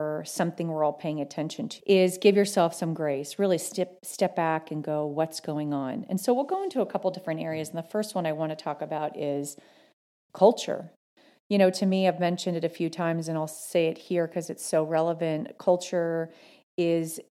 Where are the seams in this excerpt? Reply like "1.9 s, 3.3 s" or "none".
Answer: 1.8 s

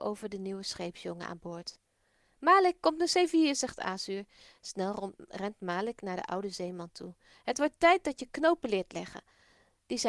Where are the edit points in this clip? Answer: none

